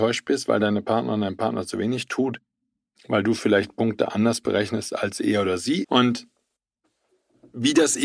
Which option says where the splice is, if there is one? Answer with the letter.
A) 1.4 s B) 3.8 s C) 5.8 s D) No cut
C